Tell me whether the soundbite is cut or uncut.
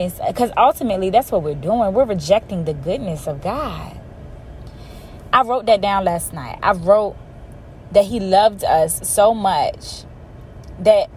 uncut